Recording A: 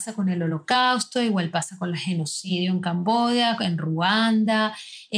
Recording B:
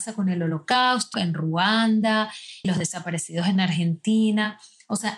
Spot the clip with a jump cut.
B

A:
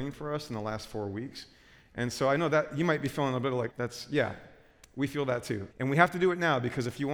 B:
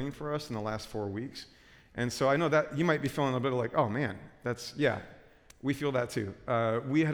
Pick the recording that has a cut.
A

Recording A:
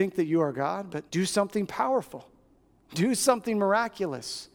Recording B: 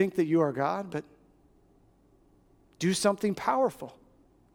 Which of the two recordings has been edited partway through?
A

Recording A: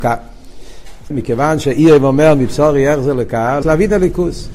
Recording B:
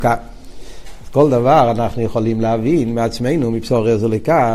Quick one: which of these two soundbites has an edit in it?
A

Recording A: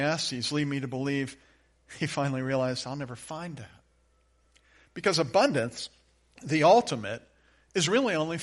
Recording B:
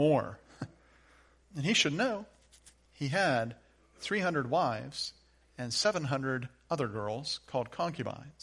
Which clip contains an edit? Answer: B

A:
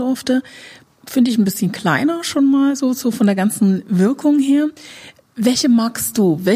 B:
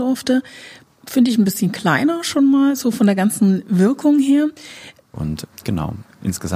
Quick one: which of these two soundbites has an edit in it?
B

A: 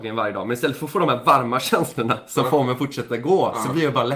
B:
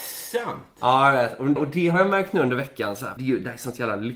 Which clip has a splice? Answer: B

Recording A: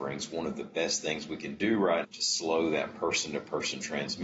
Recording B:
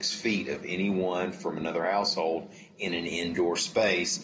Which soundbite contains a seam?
A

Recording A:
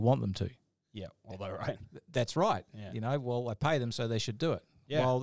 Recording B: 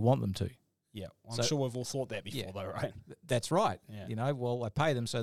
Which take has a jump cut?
A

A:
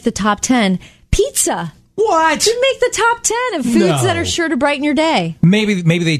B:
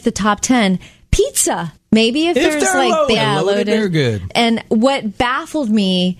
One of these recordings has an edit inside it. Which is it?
B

